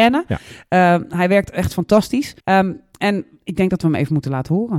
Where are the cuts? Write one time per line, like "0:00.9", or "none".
0:02.4

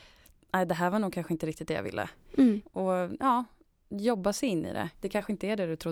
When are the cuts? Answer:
0:02.6
0:04.9

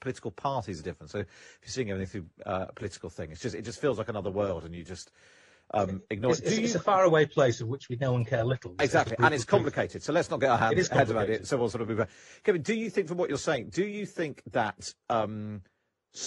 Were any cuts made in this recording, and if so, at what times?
none

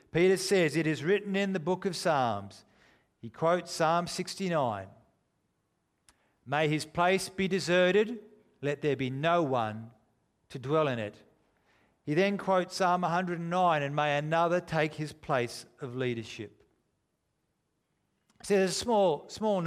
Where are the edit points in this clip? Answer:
none

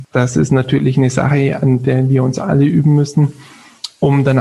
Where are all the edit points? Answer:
none

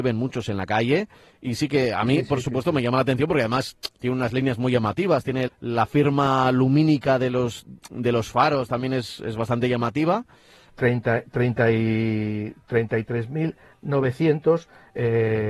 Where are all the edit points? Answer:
0:05.5
0:10.7

